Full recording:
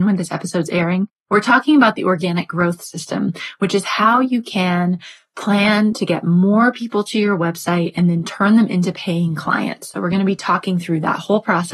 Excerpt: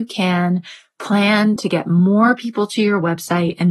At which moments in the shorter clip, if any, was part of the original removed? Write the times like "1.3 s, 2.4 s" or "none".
none